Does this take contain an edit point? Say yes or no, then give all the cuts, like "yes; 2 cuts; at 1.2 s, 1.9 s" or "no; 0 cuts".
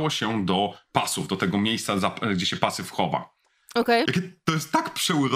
yes; 1 cut; at 4.0 s